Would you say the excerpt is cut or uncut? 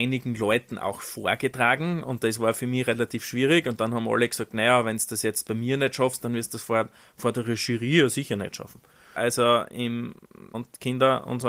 cut